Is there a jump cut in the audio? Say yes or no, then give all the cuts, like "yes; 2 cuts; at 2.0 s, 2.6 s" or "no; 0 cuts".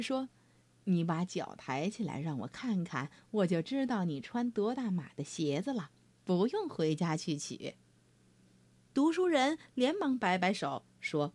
no; 0 cuts